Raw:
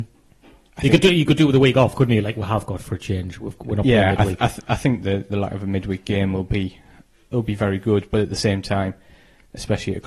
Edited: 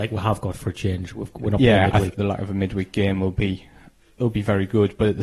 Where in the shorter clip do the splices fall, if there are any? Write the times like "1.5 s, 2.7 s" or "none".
2.1 s